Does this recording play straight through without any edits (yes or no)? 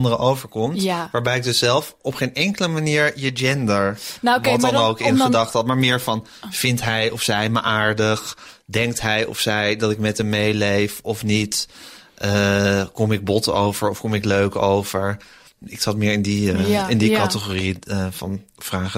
yes